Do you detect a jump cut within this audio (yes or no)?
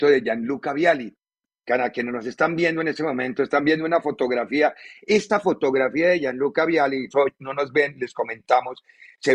yes